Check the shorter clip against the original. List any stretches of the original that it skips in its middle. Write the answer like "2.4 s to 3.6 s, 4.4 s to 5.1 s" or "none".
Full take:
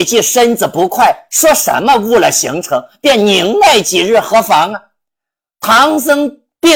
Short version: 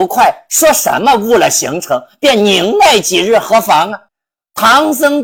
4.9 s to 5.1 s